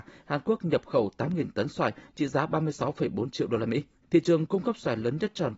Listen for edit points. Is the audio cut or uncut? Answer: cut